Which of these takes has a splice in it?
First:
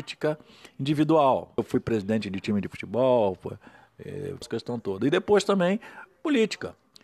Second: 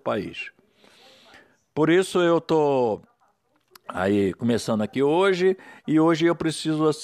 first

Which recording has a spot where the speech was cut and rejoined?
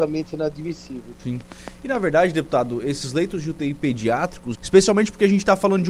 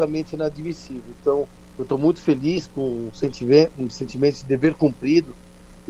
first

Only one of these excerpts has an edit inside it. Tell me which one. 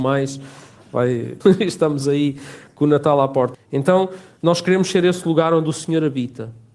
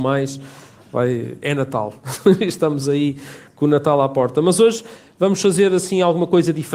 first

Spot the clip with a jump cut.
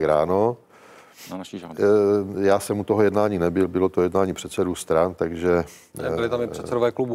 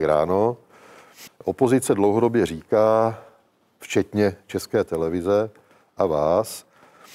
second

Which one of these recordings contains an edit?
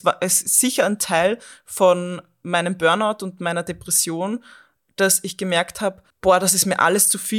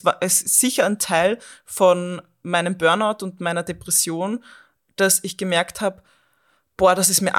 first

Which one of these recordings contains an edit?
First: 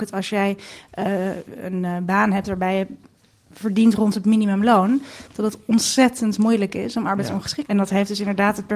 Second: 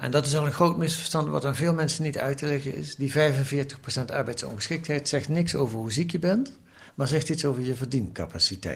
first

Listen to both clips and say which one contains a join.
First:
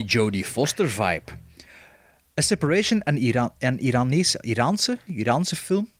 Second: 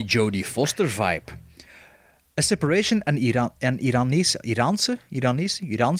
first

